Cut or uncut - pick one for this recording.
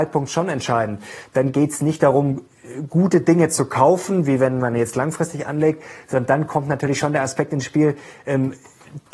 uncut